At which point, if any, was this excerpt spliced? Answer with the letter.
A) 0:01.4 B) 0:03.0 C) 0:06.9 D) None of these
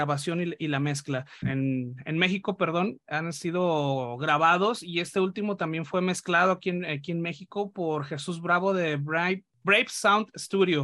A